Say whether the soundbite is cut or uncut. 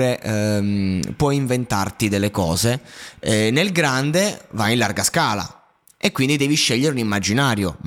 uncut